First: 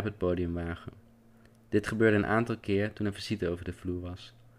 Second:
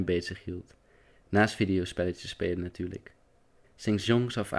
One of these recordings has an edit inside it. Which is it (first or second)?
second